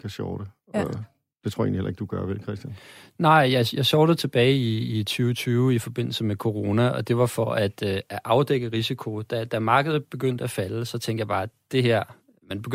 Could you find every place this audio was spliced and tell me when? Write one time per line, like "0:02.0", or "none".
none